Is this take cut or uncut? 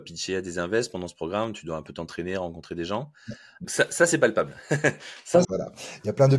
cut